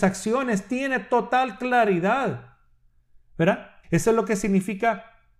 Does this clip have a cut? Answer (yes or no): yes